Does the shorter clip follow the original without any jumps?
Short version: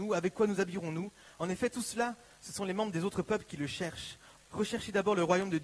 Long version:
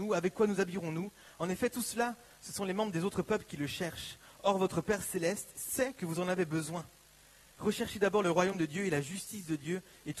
no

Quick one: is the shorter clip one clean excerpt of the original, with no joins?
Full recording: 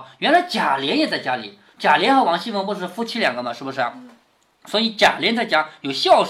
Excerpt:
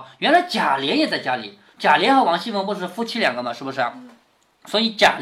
yes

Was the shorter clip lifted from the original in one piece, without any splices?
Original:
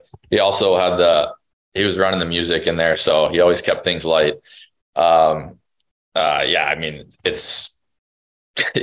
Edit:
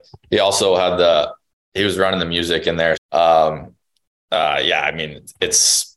no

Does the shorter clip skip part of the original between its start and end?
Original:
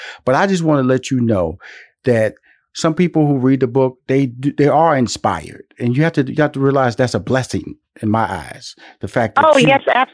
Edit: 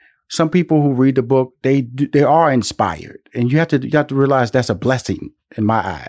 no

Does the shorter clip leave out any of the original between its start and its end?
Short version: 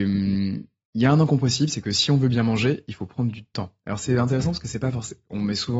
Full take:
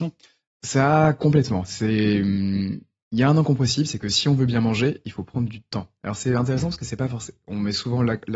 no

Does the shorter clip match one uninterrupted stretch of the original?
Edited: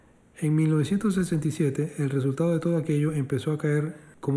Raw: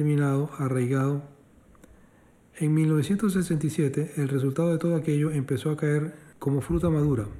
yes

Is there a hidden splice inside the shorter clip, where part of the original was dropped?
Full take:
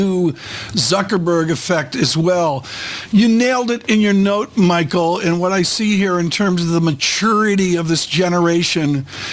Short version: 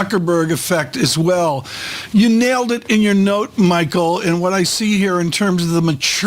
no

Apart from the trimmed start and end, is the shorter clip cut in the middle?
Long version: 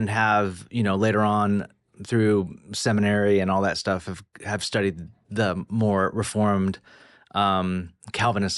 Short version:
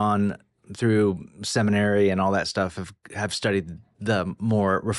no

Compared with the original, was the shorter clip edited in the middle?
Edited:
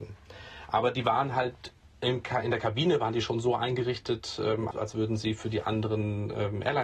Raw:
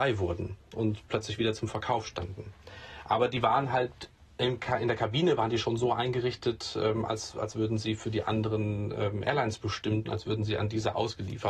yes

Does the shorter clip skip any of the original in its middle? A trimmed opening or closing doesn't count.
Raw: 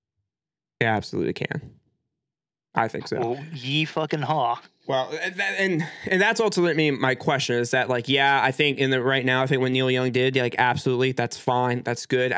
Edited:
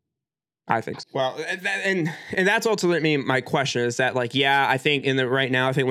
yes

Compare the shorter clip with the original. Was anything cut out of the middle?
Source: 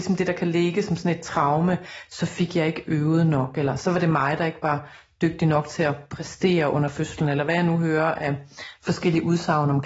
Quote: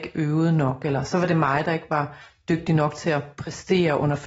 no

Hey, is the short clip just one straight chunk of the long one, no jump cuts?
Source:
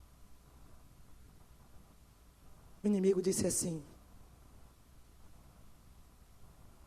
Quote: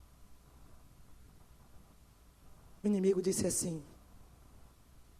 yes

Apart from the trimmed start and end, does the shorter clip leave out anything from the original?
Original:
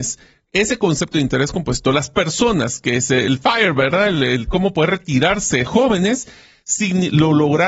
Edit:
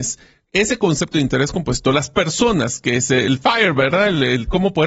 no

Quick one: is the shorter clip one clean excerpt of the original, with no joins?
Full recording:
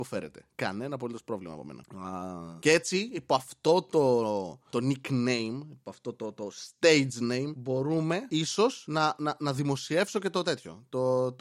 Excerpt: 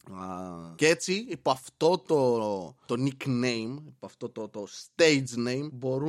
yes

